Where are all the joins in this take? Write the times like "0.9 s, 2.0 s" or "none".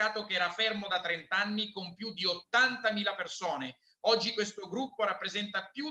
5.0 s